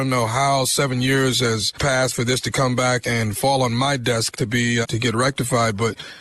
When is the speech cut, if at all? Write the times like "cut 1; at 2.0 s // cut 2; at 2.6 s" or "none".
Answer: cut 1; at 3.0 s // cut 2; at 4.8 s